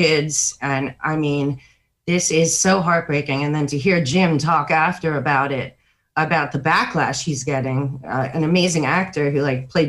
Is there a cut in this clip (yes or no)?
no